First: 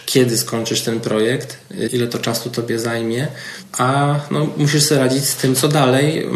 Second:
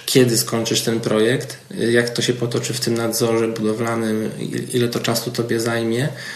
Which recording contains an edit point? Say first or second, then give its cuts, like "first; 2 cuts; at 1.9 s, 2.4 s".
first; 1 cut; at 1.9 s